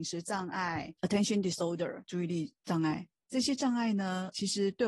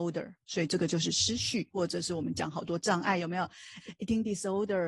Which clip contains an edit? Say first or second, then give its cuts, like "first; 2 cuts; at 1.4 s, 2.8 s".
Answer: first; 1 cut; at 1.0 s